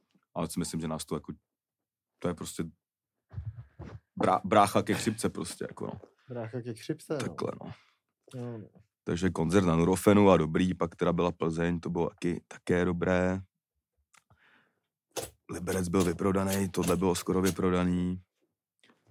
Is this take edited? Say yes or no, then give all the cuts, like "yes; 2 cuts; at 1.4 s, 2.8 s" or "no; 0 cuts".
no; 0 cuts